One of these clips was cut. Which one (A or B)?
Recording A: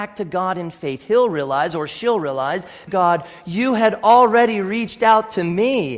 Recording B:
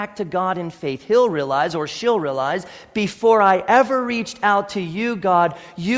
A